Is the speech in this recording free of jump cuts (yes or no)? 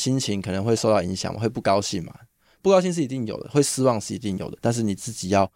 yes